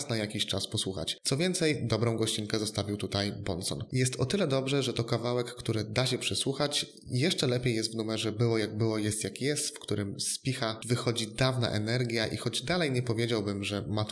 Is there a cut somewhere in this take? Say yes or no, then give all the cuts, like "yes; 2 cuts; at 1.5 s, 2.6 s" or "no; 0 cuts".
yes; 1 cut; at 3.9 s